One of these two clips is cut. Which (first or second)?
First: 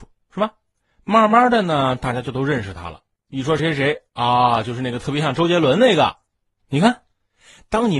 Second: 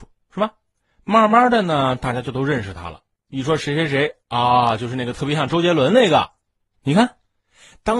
first